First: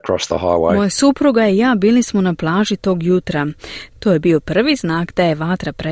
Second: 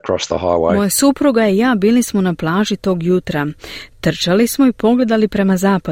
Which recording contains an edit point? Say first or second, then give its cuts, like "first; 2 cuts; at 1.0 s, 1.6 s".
first; 1 cut; at 3.9 s